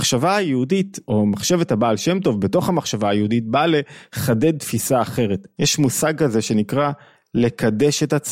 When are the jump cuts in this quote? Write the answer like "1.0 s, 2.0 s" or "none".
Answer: 5.6 s